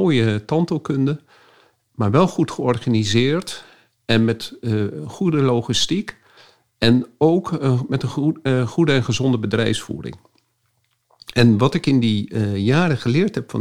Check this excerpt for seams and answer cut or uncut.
uncut